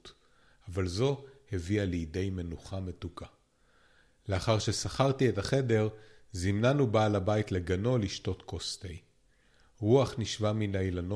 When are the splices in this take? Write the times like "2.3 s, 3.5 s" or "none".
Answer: 4.2 s